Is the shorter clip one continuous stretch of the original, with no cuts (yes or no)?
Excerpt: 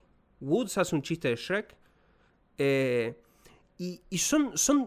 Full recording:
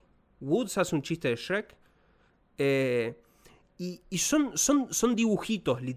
yes